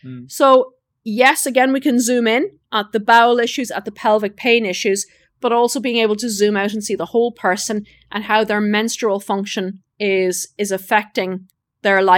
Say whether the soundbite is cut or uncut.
uncut